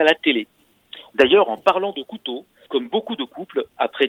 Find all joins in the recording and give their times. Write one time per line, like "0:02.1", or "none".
0:01.1
0:02.7